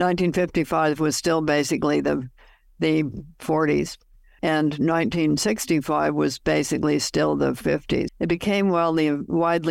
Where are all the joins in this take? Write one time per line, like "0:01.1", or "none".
0:04.4
0:08.1